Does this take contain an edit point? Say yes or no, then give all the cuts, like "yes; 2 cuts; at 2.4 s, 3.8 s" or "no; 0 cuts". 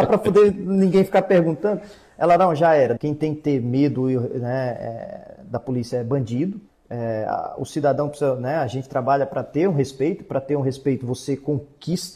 yes; 2 cuts; at 3.0 s, 6.7 s